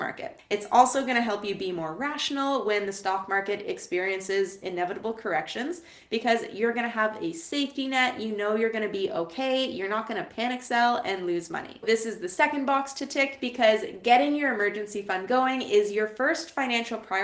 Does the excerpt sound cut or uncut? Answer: uncut